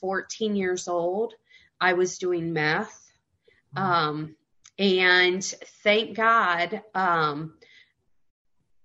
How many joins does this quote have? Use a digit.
0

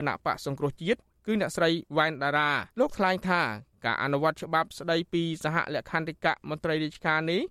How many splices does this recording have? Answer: 1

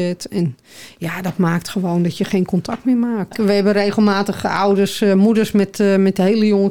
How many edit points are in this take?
1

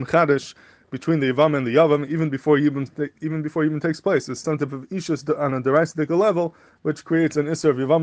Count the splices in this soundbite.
1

